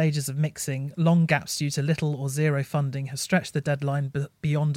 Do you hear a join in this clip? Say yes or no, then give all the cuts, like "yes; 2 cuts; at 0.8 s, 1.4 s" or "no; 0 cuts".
no; 0 cuts